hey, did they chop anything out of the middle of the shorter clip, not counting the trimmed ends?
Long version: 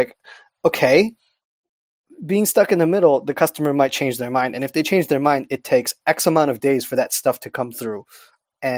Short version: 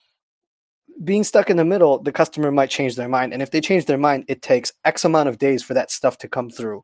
no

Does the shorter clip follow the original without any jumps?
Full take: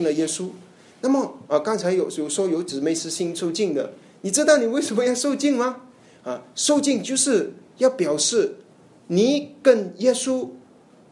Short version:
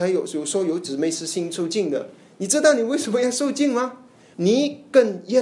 no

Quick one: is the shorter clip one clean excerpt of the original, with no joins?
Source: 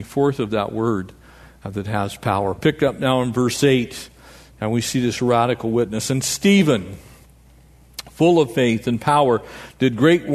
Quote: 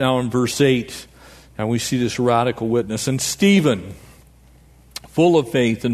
yes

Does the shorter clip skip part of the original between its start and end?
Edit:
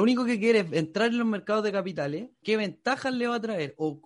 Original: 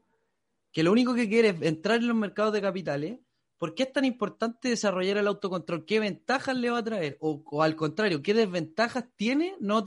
yes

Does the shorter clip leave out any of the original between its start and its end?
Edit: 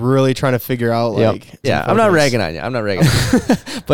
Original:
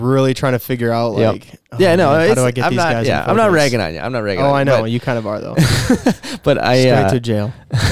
yes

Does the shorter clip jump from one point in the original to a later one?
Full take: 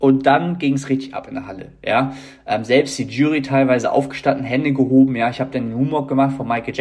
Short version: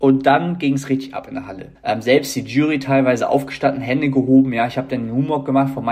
yes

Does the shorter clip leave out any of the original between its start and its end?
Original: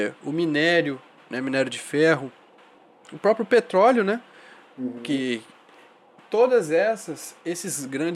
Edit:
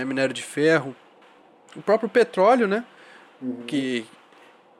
no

